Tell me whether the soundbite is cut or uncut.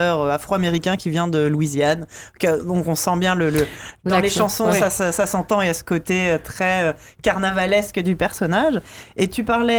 uncut